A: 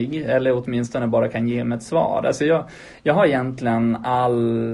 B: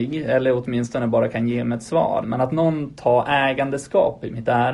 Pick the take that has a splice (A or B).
B